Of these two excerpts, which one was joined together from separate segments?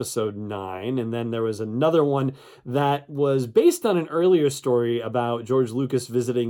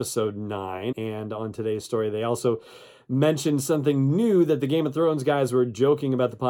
second; 1 cut; at 0.9 s

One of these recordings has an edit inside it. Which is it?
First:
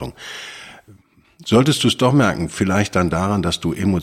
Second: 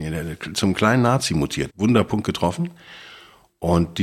second; 1 cut; at 1.7 s

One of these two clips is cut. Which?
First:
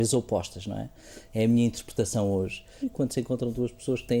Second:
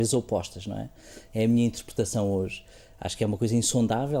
first; 1 cut; at 2.8 s

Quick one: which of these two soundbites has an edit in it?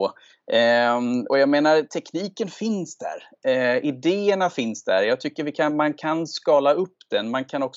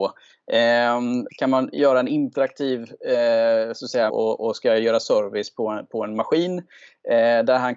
second; 2 cuts; at 1.3 s, 4.1 s

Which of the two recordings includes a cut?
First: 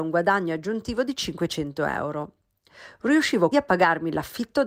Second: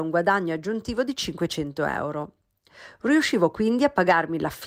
first; 1 cut; at 3.5 s

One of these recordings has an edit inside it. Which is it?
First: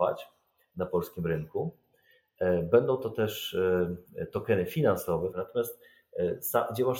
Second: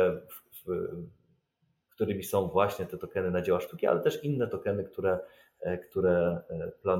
first; 1 cut; at 5.3 s

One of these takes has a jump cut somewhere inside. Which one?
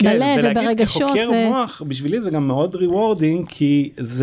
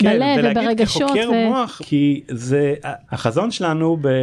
second; 2 cuts; at 1.8 s, 3.0 s

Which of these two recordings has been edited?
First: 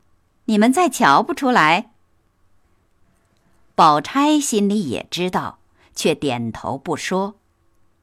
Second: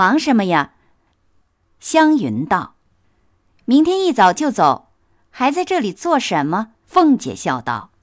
second; 3 cuts; at 1.1 s, 2.8 s, 6.8 s

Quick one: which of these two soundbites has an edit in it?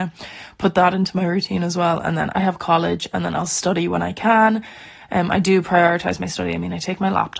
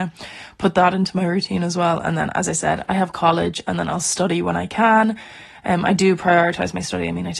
first; 1 cut; at 2.3 s

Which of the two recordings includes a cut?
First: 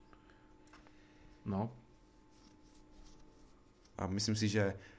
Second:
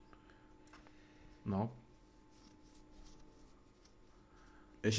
first; 1 cut; at 3.9 s

